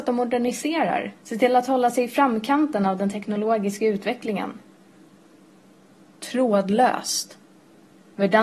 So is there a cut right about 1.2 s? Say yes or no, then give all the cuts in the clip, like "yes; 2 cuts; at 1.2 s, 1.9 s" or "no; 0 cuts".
yes; 1 cut; at 1.2 s